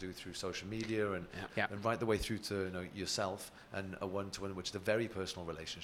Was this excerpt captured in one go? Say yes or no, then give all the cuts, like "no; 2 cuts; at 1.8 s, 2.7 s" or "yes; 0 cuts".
no; 1 cut; at 1.5 s